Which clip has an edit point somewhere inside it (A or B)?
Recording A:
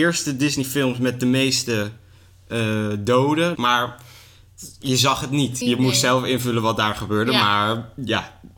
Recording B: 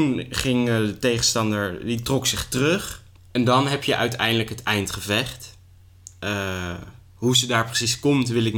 A